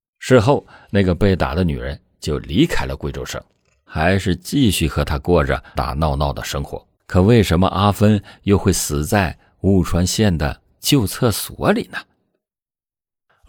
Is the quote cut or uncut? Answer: cut